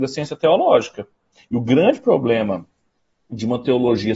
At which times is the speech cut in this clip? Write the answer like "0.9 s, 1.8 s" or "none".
1.4 s